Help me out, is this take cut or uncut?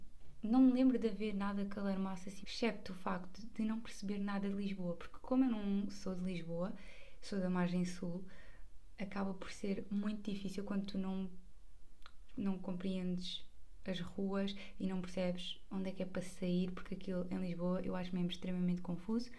cut